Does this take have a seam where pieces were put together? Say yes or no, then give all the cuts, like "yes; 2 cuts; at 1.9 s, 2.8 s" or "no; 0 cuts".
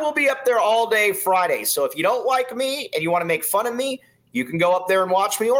no; 0 cuts